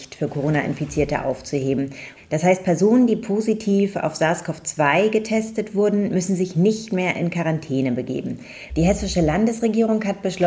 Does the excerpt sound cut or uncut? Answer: cut